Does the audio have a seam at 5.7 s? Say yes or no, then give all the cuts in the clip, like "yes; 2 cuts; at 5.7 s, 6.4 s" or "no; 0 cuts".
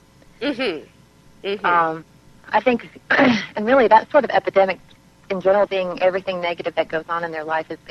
yes; 2 cuts; at 3.0 s, 5.7 s